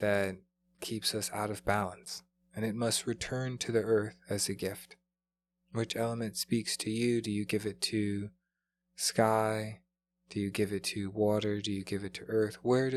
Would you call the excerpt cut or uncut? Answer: uncut